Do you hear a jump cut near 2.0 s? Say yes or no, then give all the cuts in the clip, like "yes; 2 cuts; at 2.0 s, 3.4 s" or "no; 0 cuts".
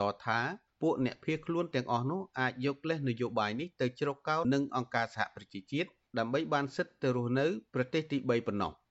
no; 1 cut; at 4.4 s